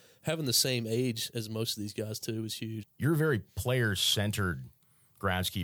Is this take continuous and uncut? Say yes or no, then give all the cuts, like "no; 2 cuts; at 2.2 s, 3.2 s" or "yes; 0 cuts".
no; 1 cut; at 2.8 s